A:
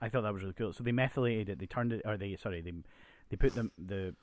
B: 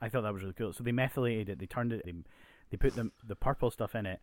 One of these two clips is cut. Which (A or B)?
B